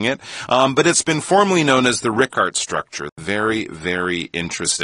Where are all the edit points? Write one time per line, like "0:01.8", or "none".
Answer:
0:03.1